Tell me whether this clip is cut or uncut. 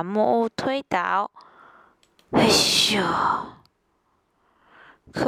uncut